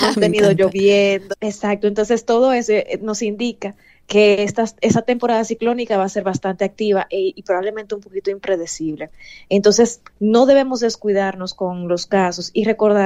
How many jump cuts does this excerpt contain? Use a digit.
1